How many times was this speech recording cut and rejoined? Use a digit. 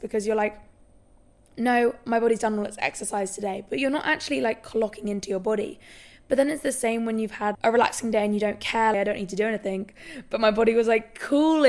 2